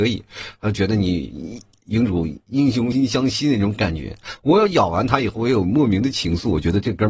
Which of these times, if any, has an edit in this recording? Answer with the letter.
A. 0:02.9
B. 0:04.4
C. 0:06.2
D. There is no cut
A